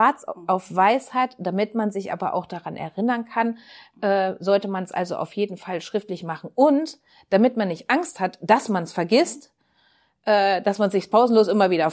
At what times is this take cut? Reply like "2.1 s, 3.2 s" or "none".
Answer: none